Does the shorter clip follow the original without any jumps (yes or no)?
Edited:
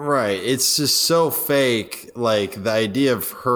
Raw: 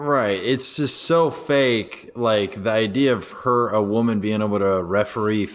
yes